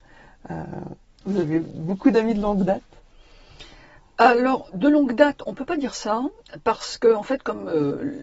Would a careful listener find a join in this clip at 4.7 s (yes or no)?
yes